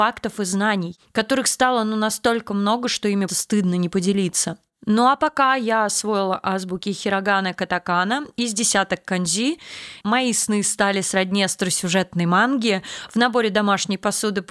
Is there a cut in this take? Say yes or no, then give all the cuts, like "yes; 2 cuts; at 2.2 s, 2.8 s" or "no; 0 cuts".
yes; 2 cuts; at 3.3 s, 10.0 s